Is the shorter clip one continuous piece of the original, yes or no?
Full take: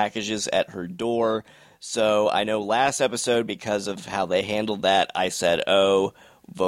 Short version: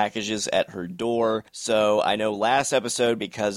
no